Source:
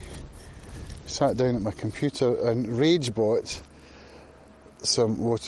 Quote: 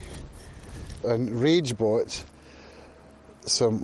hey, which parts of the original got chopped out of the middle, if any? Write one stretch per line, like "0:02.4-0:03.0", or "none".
0:01.0-0:02.4